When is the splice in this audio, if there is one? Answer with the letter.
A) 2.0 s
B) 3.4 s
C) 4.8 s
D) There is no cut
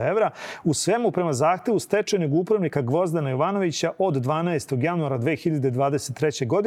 D